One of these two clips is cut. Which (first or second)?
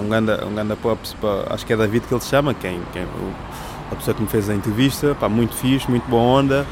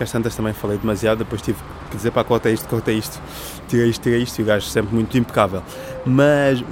second